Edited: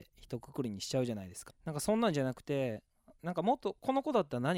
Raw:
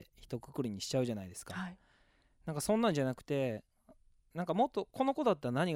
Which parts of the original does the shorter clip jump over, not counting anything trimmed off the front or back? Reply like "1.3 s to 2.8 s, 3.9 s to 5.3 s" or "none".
1.5 s to 2.3 s, 4.0 s to 4.3 s